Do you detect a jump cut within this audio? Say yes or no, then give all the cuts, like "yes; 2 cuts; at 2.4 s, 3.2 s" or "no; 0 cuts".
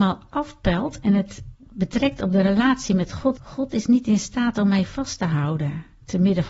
yes; 1 cut; at 3.4 s